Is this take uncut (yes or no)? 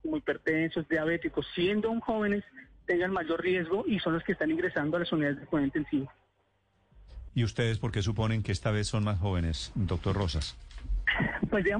no